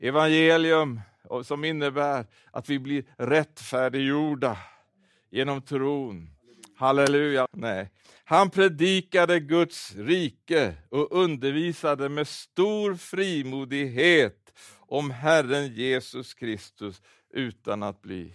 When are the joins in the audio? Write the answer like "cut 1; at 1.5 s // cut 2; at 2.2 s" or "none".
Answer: cut 1; at 7.5 s